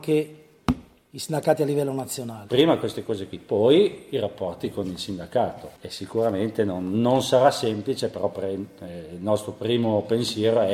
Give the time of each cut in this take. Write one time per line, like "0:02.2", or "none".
0:02.5